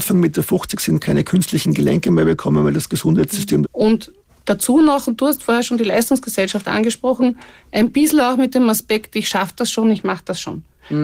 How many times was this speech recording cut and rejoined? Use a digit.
1